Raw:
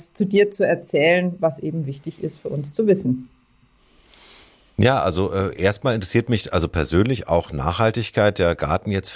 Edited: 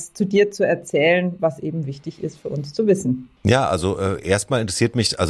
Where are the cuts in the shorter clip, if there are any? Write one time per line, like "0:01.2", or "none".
0:03.4